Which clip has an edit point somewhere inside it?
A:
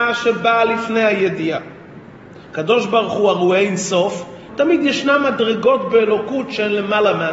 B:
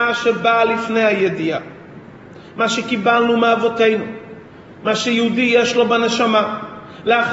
A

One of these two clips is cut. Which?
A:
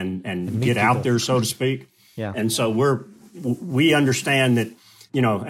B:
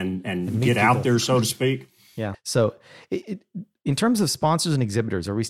B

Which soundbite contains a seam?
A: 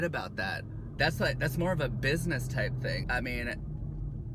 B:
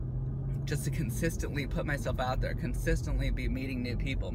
A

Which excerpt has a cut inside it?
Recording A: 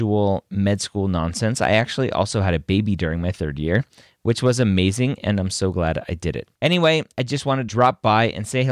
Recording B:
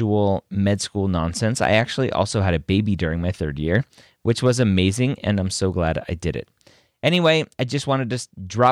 A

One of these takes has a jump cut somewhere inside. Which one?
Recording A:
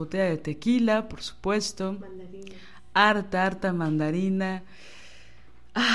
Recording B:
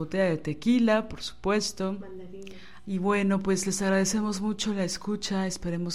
B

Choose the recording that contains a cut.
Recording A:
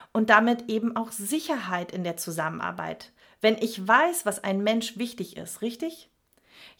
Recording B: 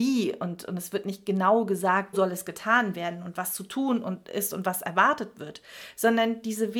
B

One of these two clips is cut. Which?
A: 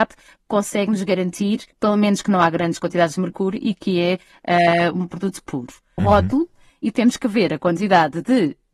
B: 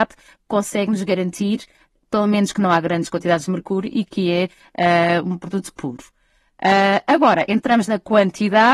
A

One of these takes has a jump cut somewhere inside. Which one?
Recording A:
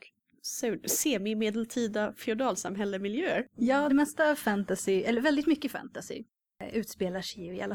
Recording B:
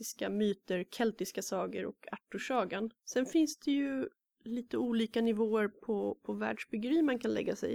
A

